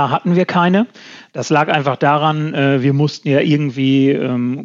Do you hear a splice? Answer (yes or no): no